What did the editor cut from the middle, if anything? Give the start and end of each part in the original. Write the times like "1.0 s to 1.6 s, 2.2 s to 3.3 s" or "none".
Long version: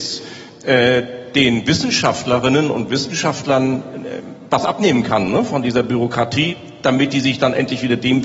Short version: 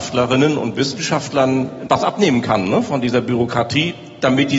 4.0 s to 4.5 s